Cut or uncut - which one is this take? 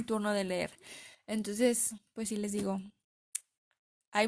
uncut